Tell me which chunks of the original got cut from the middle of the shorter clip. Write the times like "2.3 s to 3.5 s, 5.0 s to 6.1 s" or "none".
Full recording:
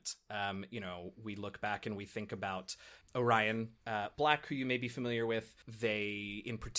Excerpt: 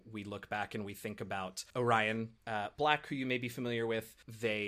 2.8 s to 3.1 s